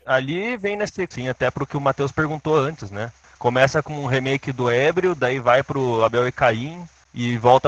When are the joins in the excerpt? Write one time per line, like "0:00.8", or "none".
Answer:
0:01.1